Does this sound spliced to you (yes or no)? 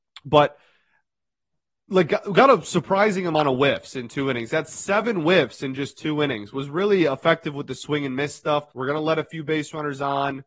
yes